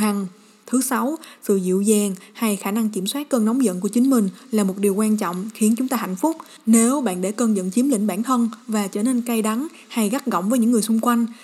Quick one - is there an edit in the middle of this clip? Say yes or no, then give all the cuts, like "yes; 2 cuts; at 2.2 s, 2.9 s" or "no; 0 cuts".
no; 0 cuts